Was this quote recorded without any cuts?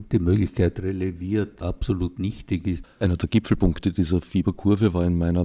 no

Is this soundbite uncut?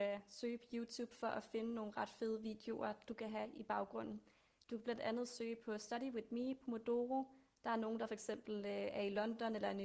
yes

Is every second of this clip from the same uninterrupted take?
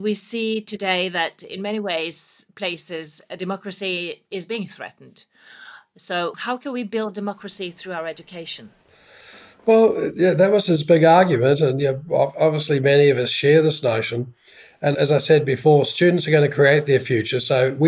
yes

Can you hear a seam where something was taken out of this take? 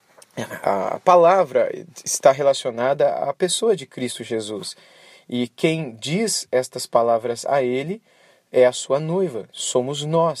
no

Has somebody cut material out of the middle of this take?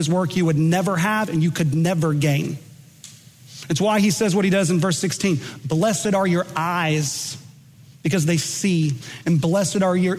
no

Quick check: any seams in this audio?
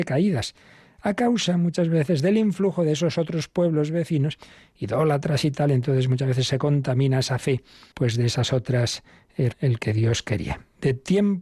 yes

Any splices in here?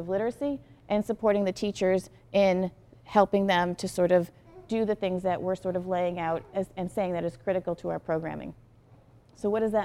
no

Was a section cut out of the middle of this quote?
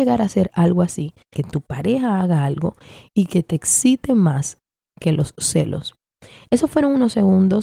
yes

